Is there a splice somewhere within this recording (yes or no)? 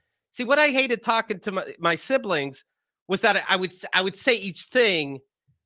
no